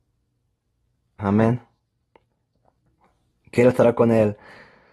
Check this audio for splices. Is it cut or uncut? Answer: cut